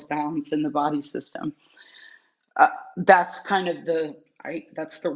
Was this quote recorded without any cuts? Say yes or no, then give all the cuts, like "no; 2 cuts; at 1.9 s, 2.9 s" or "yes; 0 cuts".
yes; 0 cuts